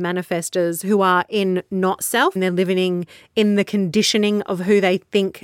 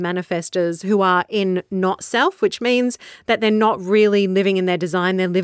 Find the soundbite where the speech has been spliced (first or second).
first